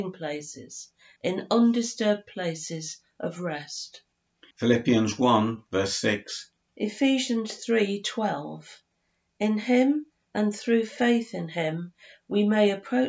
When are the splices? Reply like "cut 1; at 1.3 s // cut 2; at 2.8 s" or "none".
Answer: cut 1; at 1.2 s // cut 2; at 4.5 s // cut 3; at 6.7 s